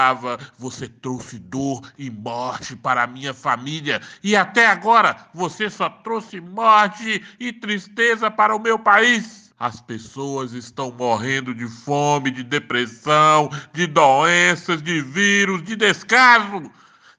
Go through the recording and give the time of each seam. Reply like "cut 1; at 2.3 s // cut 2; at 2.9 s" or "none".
cut 1; at 9.5 s